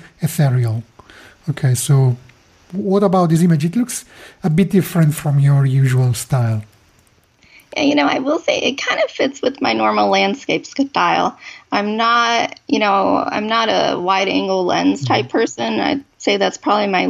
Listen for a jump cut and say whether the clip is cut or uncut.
uncut